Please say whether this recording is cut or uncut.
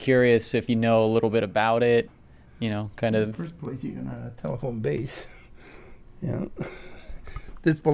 uncut